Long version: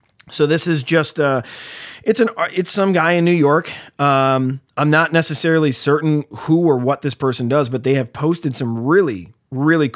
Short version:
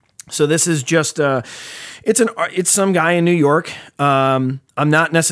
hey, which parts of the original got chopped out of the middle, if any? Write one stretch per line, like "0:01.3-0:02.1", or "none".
none